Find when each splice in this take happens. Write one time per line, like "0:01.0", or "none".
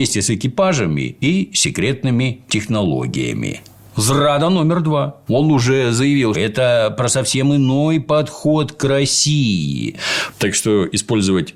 0:05.3
0:06.3
0:10.3